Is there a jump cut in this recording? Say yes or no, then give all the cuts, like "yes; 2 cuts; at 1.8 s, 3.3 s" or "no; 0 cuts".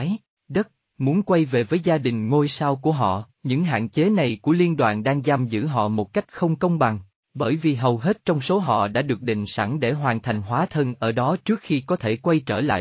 yes; 1 cut; at 3.3 s